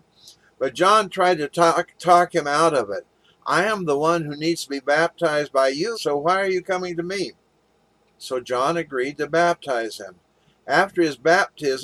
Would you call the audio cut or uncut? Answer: cut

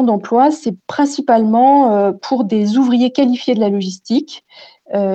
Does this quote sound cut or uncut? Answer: uncut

